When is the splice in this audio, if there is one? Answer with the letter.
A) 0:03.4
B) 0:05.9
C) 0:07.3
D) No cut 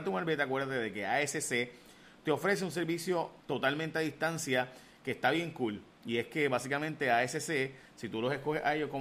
A